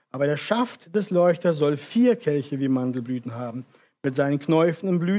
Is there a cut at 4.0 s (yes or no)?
no